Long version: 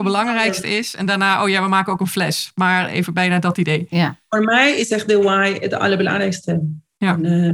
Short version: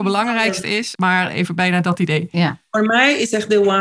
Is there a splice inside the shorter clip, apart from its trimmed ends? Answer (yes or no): yes